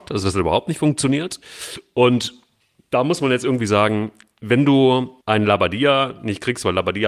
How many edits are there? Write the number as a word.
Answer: one